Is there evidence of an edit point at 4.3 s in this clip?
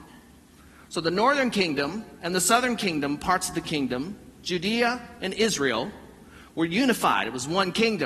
no; 0 cuts

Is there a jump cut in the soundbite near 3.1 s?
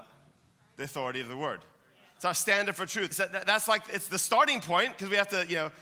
yes; 1 cut; at 3.1 s

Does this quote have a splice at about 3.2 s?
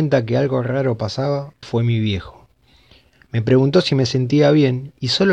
no; 1 cut; at 1.6 s

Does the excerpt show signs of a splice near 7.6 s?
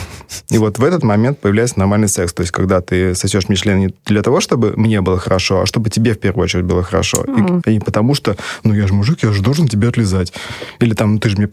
yes; 1 cut; at 7.6 s

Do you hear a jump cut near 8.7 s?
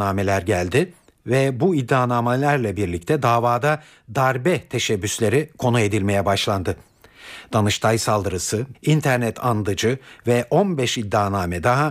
yes; 1 cut; at 8.7 s

